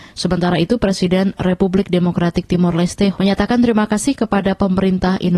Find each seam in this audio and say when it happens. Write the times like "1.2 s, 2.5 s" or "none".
3.1 s